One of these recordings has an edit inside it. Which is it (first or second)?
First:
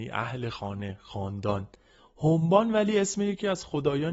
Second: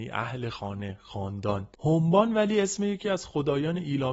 second